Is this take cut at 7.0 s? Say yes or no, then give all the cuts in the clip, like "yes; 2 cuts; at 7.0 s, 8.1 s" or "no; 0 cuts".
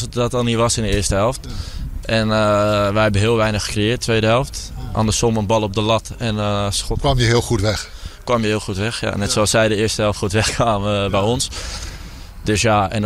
no; 0 cuts